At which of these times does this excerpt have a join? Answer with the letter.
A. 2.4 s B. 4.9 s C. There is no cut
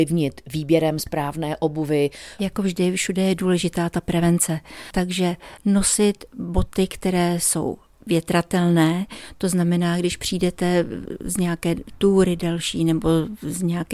A